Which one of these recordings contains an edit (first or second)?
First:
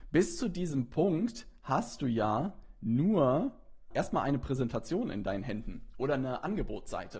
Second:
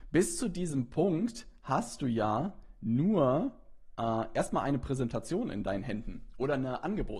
first